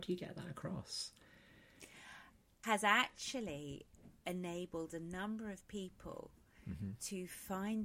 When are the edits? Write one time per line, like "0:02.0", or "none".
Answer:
0:02.6